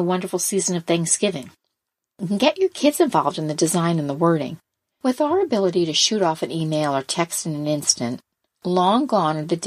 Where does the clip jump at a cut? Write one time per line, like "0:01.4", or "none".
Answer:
0:04.9